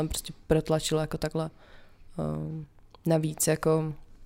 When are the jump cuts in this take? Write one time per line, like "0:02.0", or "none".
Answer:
none